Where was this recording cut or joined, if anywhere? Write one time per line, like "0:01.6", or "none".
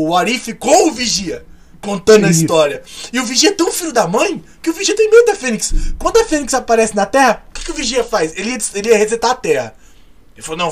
none